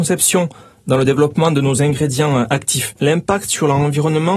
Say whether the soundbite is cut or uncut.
cut